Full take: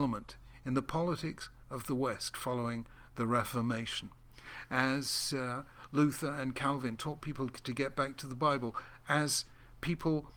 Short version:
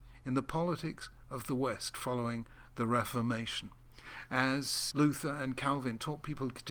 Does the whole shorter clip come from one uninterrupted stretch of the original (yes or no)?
no